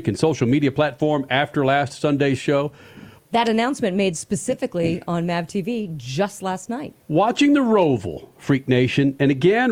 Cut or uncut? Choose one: cut